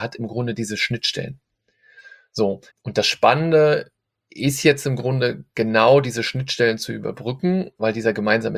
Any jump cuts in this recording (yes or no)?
yes